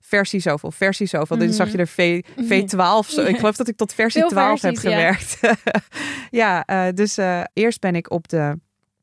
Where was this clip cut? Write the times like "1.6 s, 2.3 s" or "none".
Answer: none